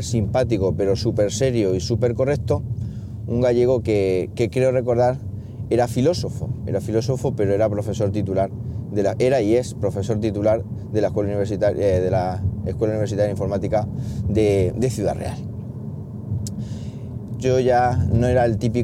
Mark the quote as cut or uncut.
cut